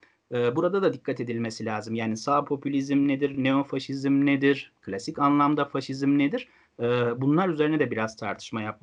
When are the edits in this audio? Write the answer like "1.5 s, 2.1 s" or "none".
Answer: none